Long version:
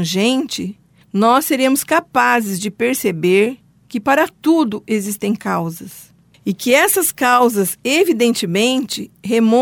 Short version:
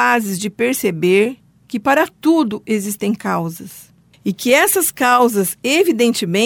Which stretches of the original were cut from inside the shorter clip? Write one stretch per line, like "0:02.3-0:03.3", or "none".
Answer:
none